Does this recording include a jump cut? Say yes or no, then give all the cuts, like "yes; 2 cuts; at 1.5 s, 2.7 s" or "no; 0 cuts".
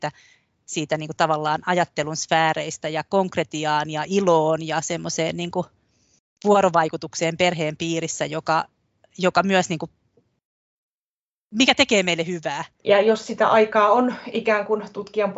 yes; 1 cut; at 12.8 s